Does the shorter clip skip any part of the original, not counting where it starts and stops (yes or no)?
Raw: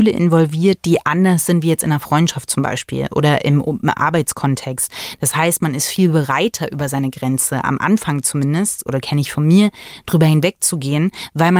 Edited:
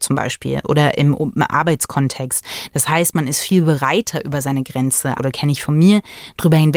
yes